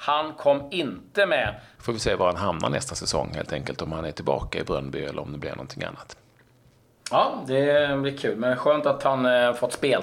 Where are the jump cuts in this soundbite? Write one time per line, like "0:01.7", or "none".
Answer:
0:01.8